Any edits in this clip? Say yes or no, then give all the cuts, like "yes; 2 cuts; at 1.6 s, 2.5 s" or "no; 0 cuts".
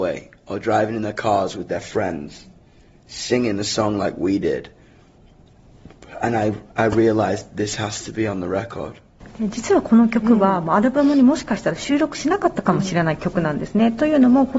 no; 0 cuts